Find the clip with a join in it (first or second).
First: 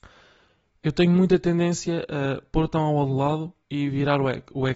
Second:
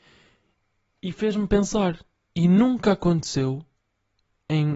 first